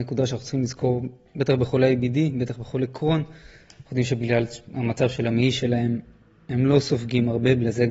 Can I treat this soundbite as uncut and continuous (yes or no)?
yes